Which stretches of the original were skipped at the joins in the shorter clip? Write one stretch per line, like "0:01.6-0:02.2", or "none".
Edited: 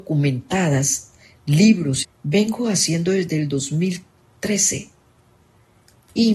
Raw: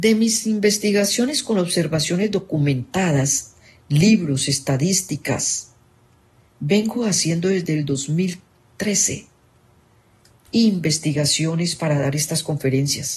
0:04.5-0:06.4